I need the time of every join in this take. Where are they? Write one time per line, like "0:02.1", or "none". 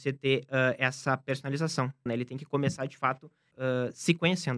0:02.1
0:03.5